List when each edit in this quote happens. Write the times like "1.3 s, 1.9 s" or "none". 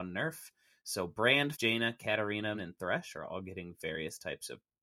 1.5 s, 2.5 s